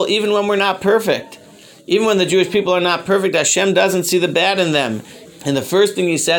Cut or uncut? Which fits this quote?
cut